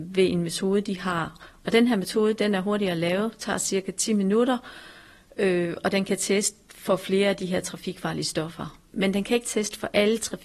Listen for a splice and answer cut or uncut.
uncut